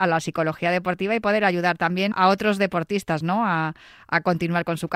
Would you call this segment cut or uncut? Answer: cut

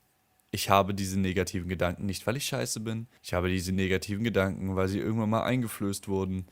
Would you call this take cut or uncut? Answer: cut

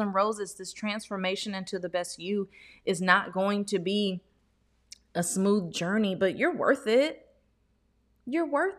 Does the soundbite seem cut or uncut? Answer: uncut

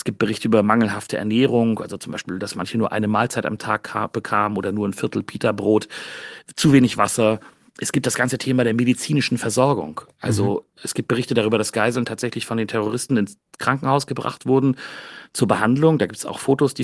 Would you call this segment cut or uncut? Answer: uncut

